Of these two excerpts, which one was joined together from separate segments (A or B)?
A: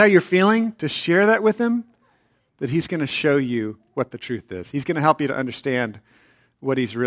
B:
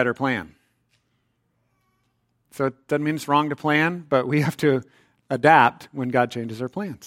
A